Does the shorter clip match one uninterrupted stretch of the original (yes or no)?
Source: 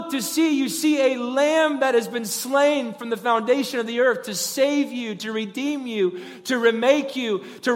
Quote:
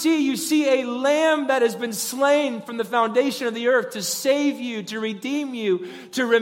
yes